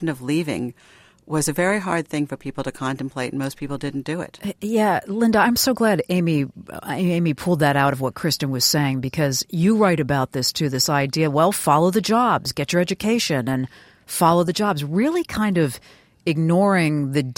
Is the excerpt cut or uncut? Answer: uncut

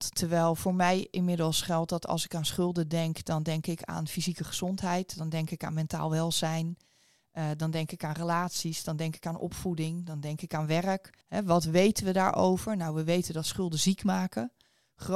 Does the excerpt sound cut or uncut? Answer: cut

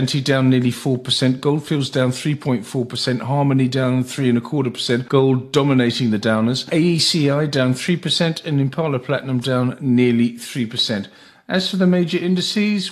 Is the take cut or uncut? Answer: uncut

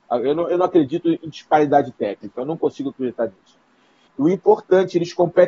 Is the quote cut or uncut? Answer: cut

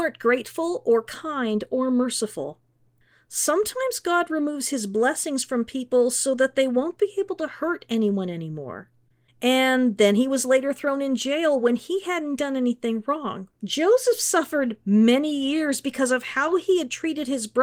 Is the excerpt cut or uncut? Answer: cut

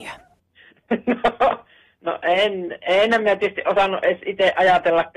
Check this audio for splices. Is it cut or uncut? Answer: uncut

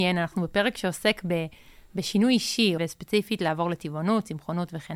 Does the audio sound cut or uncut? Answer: cut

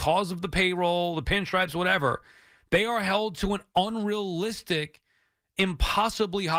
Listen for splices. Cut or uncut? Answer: uncut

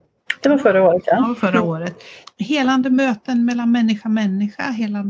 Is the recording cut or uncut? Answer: cut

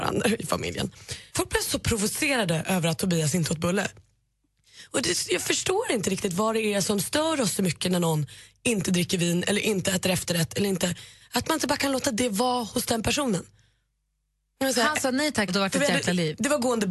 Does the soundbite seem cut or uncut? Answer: cut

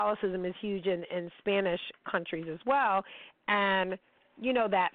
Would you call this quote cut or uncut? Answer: uncut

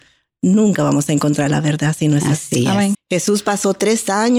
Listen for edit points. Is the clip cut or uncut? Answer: cut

